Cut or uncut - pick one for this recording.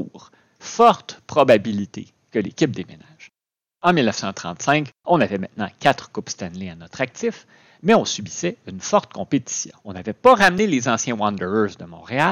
cut